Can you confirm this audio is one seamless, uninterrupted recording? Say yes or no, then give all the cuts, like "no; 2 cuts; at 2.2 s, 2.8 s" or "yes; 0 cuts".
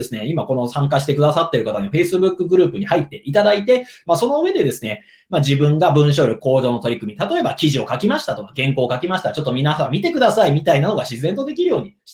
yes; 0 cuts